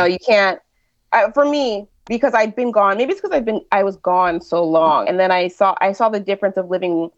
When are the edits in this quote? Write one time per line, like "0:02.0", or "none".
0:02.0
0:05.0